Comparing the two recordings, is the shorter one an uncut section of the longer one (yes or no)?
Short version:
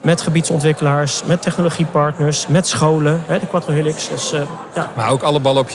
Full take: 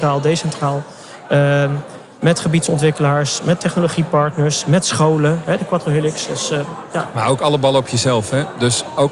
yes